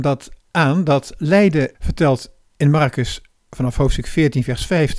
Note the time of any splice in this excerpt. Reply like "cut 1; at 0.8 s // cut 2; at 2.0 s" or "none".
cut 1; at 1.7 s